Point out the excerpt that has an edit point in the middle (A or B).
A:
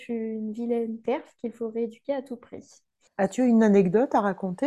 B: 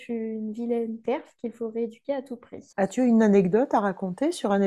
B